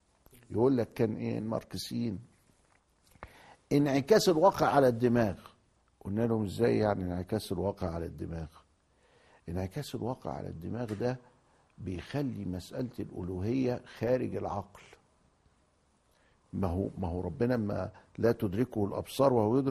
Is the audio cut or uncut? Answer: uncut